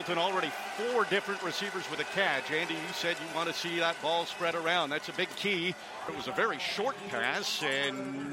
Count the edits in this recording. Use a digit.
1